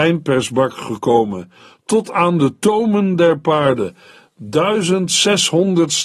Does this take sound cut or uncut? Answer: uncut